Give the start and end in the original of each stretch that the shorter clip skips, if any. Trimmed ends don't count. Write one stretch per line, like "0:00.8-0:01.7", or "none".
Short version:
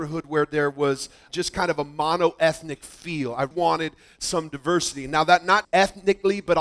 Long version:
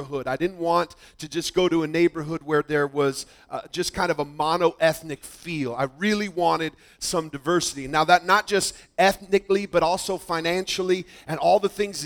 0:03.5-0:03.7
0:05.9-0:06.3
0:08.4-0:08.9